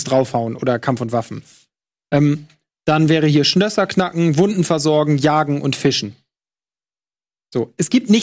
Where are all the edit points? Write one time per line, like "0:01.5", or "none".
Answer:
none